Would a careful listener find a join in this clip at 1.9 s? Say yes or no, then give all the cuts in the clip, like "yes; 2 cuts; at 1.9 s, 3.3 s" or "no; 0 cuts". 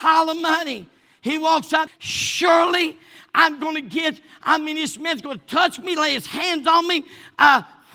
yes; 1 cut; at 1.9 s